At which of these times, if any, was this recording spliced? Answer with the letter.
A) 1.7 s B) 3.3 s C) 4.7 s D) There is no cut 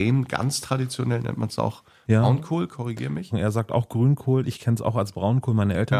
B